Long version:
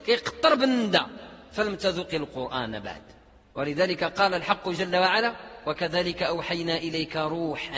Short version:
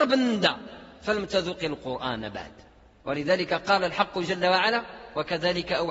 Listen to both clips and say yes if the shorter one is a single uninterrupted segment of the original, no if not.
yes